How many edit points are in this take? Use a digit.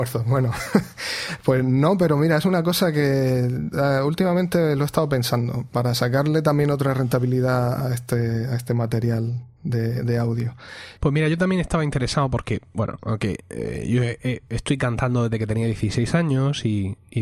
1